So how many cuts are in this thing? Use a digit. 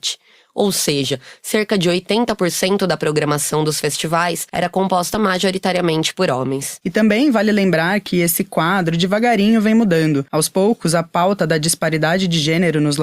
1